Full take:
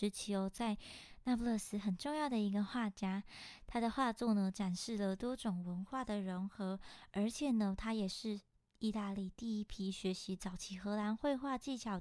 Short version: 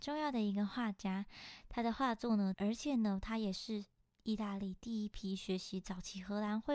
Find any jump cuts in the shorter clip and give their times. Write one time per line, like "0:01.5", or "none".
0:02.5